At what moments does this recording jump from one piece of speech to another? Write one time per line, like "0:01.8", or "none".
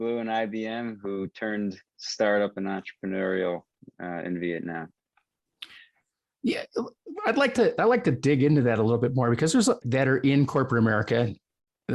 0:09.8